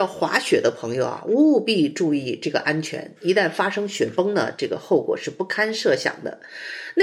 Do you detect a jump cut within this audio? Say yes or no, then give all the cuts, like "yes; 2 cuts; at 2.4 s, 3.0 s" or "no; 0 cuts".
yes; 1 cut; at 3.2 s